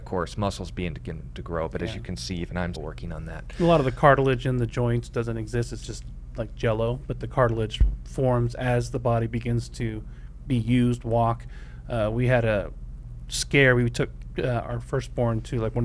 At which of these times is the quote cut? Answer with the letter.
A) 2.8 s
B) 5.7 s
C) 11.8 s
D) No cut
A